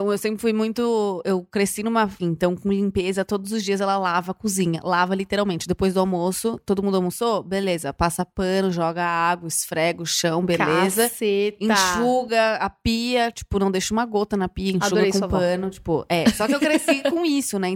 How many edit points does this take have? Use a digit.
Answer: 1